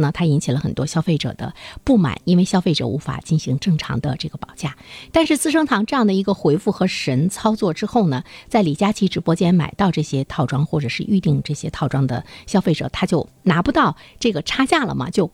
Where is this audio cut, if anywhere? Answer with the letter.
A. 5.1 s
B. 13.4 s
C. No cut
A